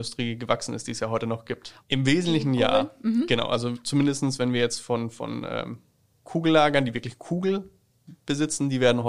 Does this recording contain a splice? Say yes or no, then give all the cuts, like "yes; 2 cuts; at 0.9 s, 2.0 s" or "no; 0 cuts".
yes; 1 cut; at 1.8 s